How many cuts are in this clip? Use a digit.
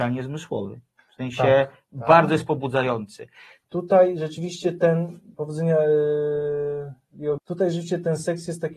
3